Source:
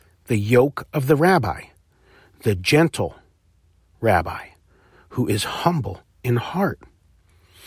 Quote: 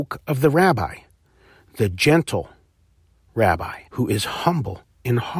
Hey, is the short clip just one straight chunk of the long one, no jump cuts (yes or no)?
no